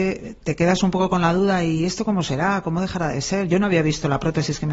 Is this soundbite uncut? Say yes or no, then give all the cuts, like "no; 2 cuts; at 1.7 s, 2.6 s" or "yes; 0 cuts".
yes; 0 cuts